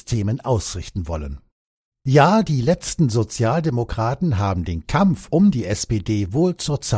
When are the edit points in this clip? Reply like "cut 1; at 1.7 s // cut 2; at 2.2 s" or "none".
cut 1; at 1.9 s